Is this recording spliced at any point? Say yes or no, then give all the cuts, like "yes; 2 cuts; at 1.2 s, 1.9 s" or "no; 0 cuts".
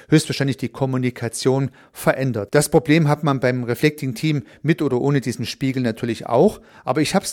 yes; 1 cut; at 2.5 s